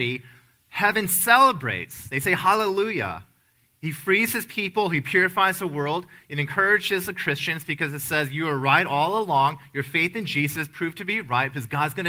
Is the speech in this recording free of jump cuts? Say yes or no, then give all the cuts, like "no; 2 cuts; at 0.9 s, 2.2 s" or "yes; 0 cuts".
yes; 0 cuts